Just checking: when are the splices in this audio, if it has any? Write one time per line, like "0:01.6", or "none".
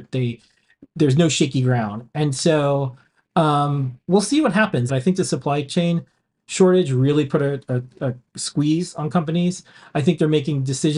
0:04.9